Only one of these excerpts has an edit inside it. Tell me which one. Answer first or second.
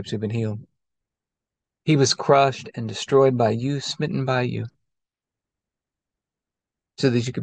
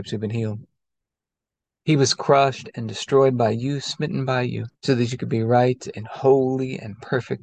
second